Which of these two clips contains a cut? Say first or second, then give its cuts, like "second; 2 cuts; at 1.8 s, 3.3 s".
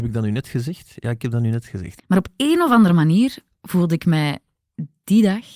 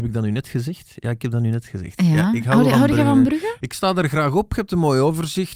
first; 1 cut; at 2.0 s